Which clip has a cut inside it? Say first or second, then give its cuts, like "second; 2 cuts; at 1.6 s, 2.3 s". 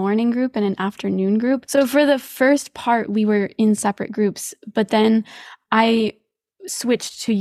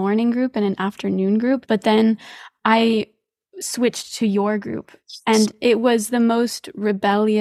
second; 1 cut; at 1.7 s